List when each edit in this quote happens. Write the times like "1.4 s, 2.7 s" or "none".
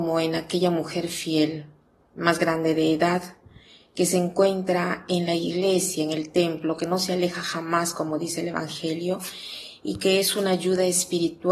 none